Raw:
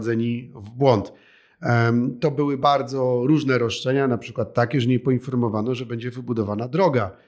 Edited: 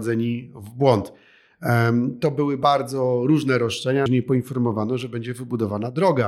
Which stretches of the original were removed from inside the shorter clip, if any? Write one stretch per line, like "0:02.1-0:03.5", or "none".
0:04.1-0:04.8

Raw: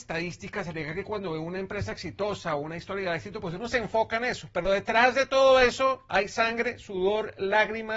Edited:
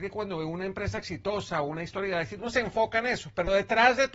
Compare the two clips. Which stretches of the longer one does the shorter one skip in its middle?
0:03.3-0:03.6

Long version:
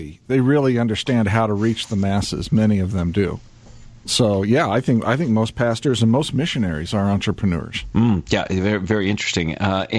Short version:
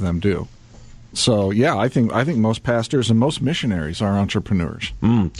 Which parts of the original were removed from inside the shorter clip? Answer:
none

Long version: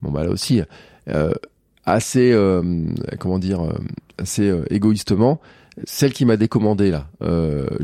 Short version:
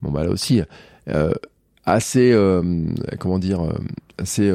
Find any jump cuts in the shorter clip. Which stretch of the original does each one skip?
none

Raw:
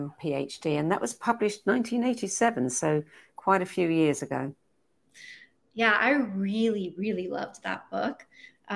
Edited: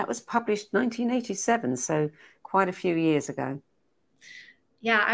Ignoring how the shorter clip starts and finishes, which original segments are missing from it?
none

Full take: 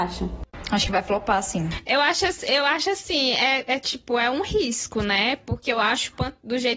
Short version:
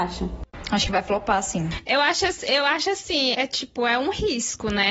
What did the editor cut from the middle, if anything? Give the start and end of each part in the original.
0:03.3-0:03.7

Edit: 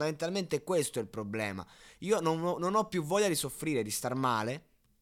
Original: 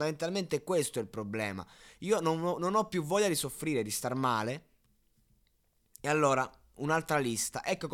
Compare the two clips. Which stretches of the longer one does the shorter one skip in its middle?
none

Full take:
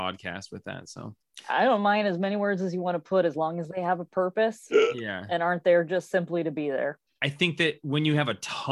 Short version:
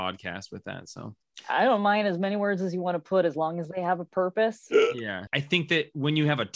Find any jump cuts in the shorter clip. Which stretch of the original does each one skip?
0:05.3-0:07.2

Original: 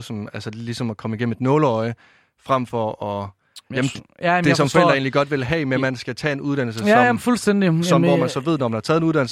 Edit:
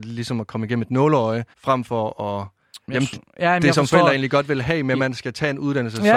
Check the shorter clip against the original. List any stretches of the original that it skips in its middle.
0:02.0-0:02.3

